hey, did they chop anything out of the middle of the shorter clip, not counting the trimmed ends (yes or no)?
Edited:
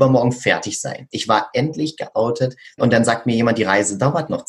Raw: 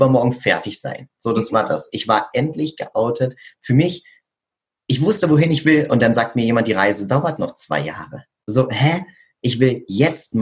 yes